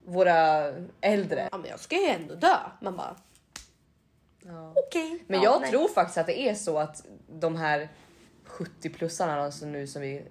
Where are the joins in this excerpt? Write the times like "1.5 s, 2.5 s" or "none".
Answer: 1.5 s